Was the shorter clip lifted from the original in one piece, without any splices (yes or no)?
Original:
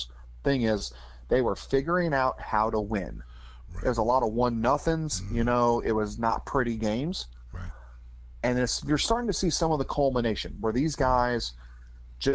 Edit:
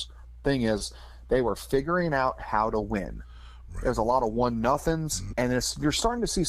no